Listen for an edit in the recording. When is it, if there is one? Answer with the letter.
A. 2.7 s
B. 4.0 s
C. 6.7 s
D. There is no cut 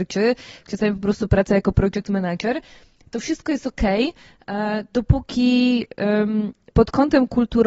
C